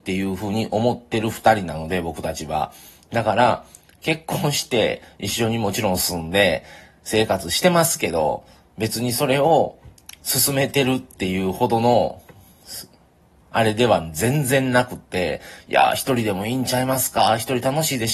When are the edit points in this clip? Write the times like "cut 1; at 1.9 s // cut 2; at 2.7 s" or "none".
none